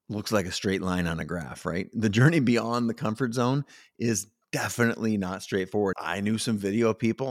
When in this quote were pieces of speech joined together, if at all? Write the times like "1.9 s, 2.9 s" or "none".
5.9 s